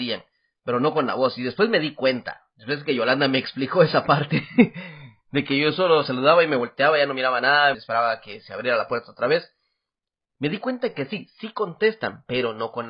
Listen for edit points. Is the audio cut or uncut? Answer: cut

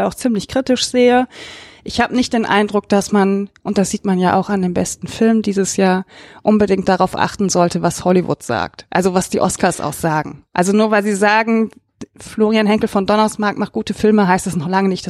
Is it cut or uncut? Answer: uncut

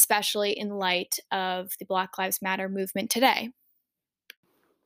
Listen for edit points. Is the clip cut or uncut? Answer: uncut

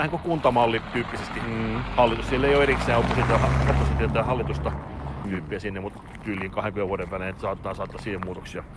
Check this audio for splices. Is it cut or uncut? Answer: cut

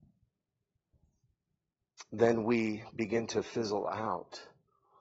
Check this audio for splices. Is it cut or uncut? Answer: uncut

